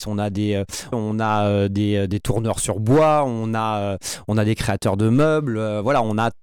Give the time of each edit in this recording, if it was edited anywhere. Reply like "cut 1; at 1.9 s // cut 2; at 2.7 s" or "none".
cut 1; at 0.9 s